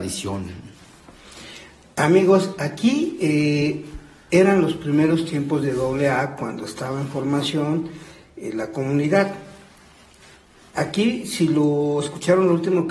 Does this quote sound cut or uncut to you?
uncut